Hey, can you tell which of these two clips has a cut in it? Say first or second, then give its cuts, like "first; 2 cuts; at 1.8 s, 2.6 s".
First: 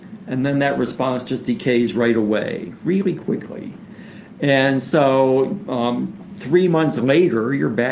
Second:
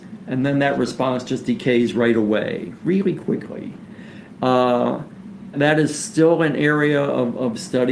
second; 2 cuts; at 4.4 s, 5.5 s